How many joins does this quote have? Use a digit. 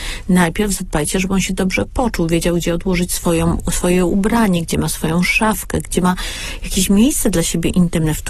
0